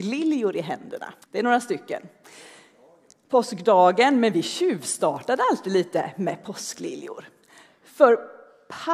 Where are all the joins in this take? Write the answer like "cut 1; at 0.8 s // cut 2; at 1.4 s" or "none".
cut 1; at 1.2 s